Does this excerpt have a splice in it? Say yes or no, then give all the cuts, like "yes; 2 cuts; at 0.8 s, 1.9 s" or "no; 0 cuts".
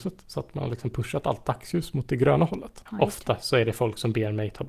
yes; 1 cut; at 2.9 s